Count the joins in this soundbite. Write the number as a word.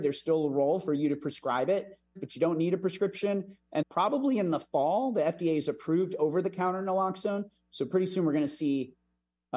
two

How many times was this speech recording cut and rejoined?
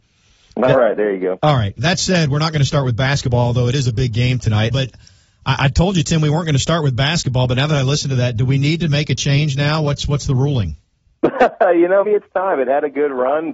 two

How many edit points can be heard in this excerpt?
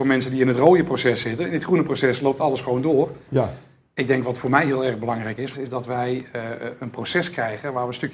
two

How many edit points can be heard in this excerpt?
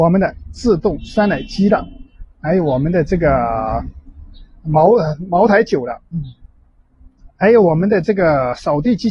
one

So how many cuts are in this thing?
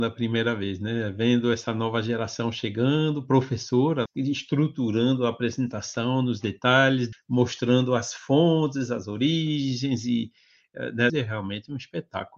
three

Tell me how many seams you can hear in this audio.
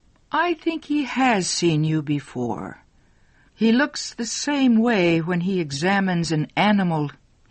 one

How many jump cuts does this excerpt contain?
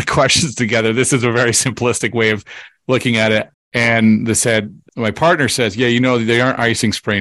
two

